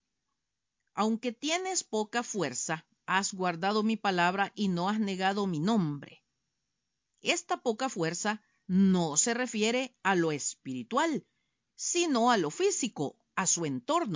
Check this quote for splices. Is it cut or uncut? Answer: uncut